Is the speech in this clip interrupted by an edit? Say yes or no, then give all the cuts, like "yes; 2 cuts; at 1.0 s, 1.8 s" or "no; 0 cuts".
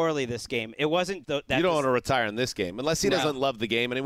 yes; 1 cut; at 1.2 s